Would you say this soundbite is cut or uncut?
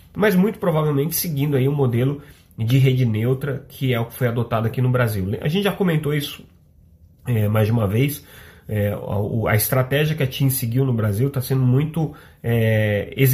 uncut